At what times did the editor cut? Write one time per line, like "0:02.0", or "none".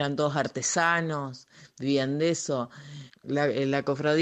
0:03.1